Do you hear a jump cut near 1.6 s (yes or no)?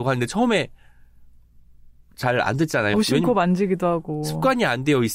no